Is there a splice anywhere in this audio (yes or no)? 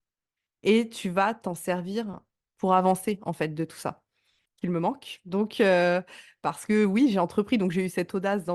yes